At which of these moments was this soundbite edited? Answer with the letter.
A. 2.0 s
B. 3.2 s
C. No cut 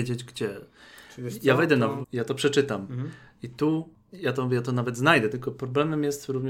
A